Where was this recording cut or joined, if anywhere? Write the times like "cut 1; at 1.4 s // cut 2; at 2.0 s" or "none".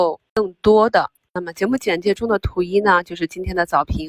cut 1; at 1.3 s